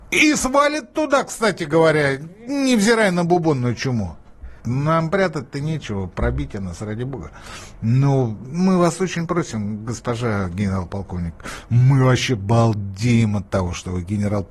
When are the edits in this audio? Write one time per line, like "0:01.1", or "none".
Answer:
0:04.6